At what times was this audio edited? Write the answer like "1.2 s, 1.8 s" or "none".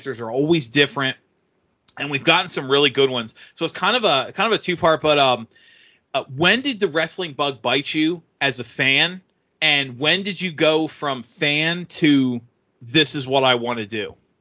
none